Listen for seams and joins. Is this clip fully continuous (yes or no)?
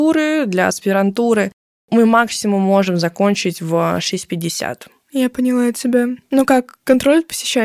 yes